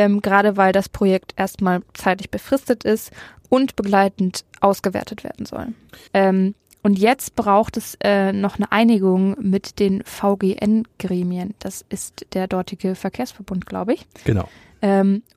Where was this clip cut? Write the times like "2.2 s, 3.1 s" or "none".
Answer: 6.1 s